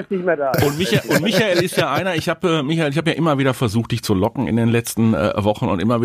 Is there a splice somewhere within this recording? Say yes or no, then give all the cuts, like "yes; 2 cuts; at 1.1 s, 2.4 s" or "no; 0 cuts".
no; 0 cuts